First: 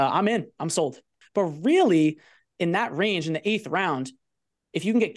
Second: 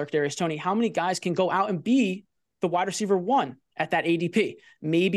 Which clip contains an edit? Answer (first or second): first